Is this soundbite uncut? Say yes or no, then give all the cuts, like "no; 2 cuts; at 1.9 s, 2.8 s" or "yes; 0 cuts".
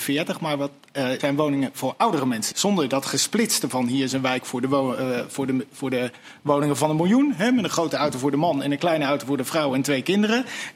no; 2 cuts; at 1.2 s, 2.5 s